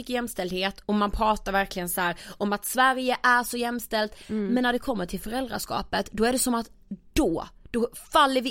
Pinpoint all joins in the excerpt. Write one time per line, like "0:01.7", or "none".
none